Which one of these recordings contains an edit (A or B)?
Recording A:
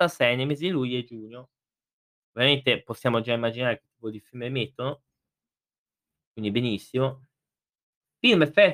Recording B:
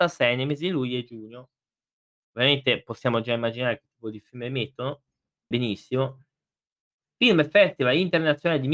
B